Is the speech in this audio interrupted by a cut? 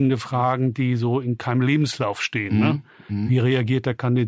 no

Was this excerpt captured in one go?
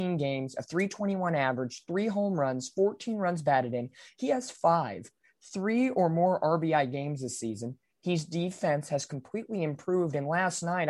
yes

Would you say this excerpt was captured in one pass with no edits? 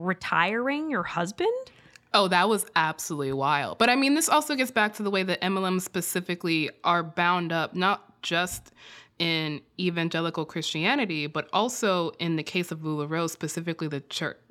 yes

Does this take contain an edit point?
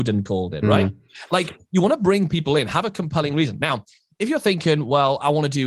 no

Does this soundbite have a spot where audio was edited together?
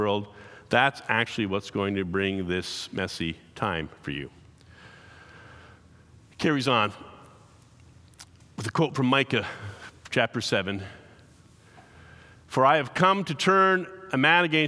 no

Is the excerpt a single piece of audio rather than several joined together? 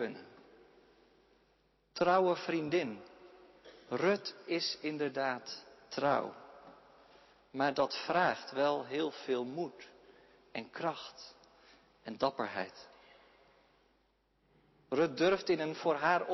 yes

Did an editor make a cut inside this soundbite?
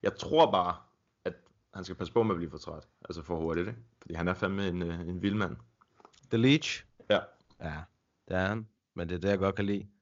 no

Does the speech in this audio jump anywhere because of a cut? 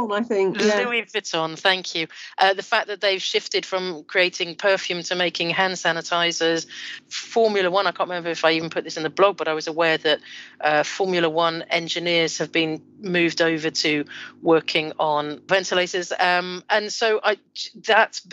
no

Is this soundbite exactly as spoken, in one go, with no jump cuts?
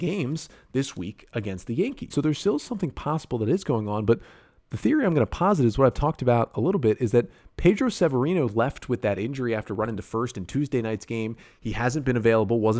no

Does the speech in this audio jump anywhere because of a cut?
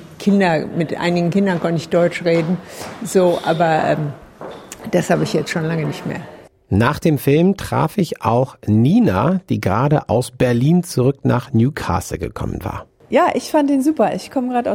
no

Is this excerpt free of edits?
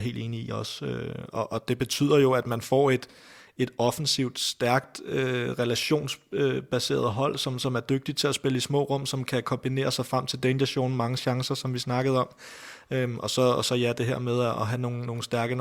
yes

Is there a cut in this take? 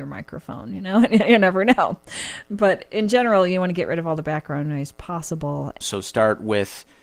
yes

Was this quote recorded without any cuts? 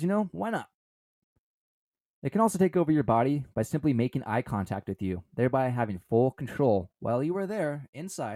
yes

